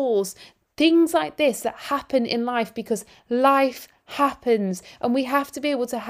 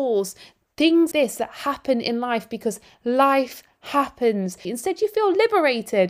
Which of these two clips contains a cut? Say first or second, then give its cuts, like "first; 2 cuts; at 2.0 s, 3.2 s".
second; 2 cuts; at 1.1 s, 4.6 s